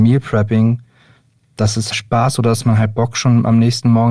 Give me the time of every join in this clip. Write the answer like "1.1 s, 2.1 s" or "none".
1.9 s

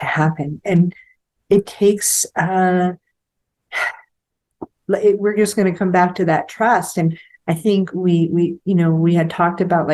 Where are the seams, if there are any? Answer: none

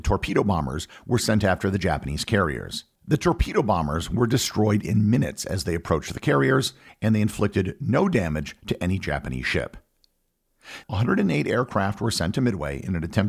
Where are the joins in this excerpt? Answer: 3.0 s, 10.8 s

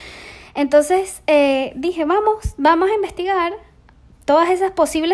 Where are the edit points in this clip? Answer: none

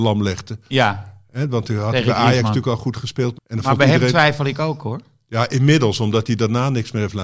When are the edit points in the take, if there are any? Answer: 3.3 s

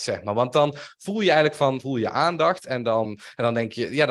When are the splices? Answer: 1.8 s, 3.0 s

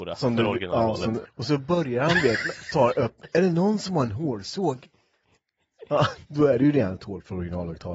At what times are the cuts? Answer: 1.2 s, 6.3 s

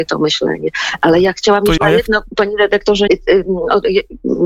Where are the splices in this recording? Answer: 1.8 s, 3.1 s

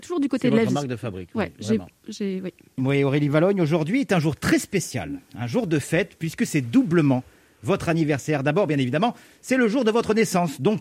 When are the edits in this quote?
2.8 s

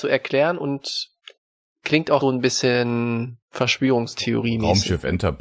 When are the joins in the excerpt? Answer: 2.2 s, 3.4 s

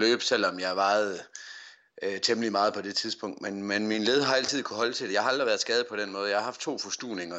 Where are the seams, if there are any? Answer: none

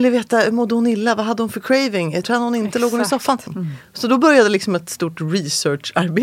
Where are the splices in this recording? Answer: 2.2 s, 3.5 s

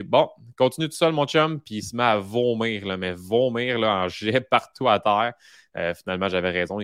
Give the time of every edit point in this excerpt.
none

